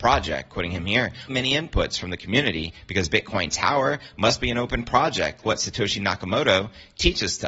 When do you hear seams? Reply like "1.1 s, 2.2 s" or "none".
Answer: 1.3 s, 5.4 s